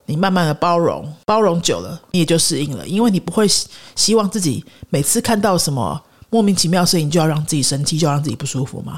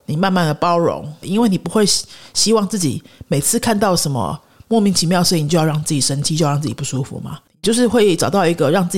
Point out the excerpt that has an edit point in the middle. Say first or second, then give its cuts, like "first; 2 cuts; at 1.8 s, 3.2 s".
second; 1 cut; at 1.2 s